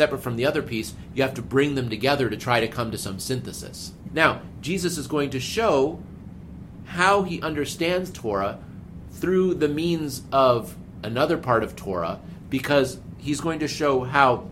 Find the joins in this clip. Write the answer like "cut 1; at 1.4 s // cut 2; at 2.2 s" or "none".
cut 1; at 4.1 s

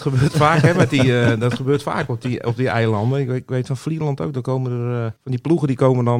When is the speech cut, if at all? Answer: cut 1; at 5.2 s

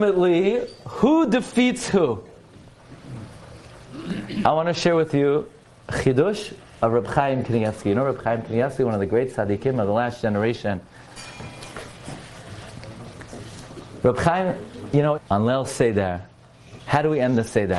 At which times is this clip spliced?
cut 1; at 15.2 s // cut 2; at 16.8 s

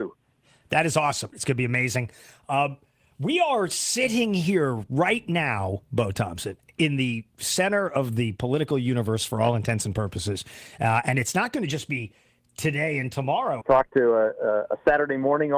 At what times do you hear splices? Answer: cut 1; at 1.3 s // cut 2; at 13.6 s

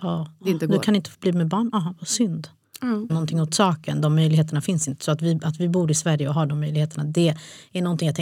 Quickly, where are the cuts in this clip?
cut 1; at 3.1 s

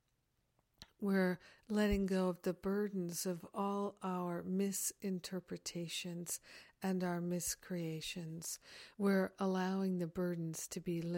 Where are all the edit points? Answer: cut 1; at 8.9 s

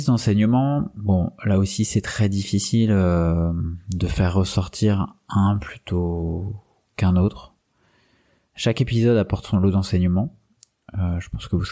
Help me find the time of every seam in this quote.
none

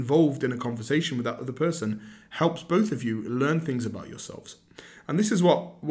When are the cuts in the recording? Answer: none

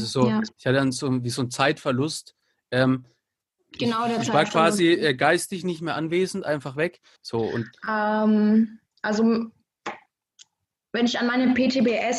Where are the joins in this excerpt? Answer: cut 1; at 7.2 s

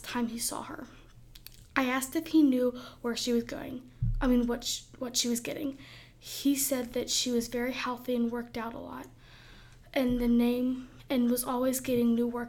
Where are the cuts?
none

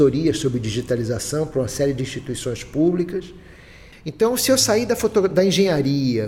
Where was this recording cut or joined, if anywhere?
cut 1; at 3.9 s

